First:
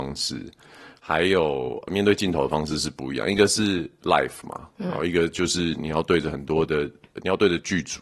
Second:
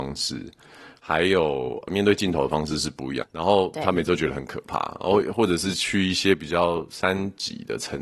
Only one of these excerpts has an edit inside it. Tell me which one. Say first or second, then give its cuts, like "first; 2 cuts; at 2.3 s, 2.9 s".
second; 1 cut; at 3.2 s